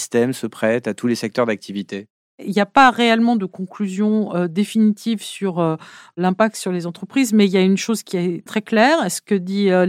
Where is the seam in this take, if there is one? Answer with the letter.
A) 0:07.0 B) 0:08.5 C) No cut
B